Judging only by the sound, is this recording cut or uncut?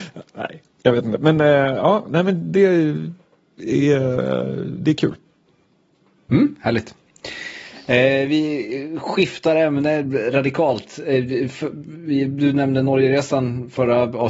uncut